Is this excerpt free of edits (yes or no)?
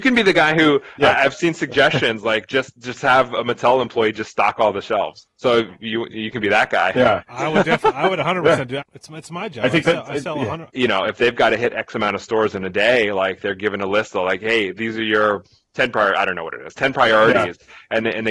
no